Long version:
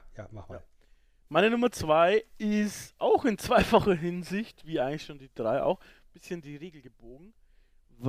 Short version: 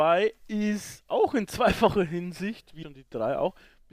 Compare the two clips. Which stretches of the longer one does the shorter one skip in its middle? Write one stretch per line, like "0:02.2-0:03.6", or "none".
0:04.7-0:05.1